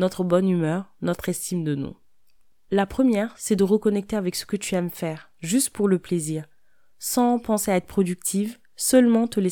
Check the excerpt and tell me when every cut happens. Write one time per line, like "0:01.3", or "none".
0:02.5